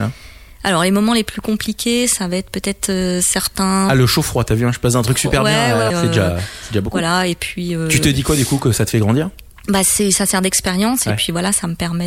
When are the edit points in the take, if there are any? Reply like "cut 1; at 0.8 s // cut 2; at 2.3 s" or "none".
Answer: cut 1; at 5.9 s